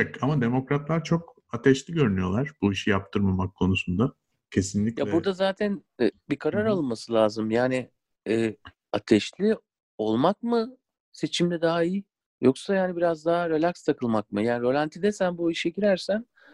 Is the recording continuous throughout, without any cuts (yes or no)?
yes